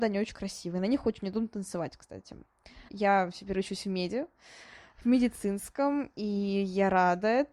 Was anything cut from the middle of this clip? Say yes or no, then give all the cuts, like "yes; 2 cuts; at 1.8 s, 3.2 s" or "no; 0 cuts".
yes; 1 cut; at 2.9 s